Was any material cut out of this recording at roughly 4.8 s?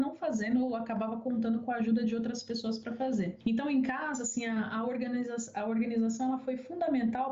no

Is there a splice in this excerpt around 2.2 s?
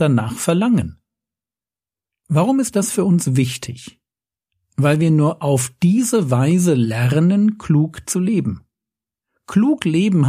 no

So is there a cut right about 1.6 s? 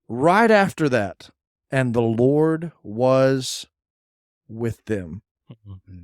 yes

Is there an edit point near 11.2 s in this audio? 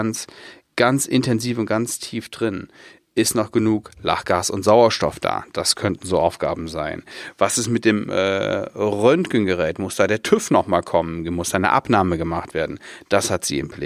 no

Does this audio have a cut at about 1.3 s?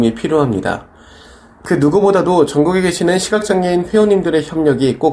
no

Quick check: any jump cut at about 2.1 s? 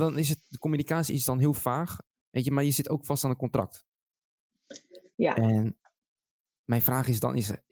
yes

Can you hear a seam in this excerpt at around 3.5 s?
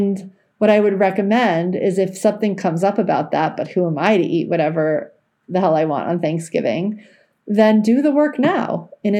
no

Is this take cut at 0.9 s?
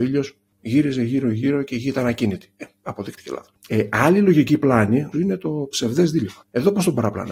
no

